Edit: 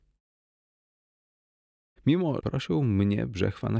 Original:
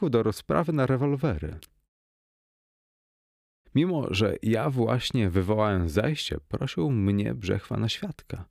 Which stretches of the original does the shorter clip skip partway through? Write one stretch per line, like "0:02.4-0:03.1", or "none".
0:04.1-0:06.5